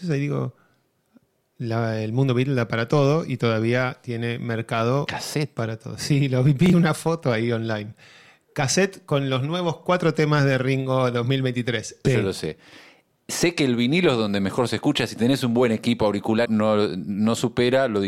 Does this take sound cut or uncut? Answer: cut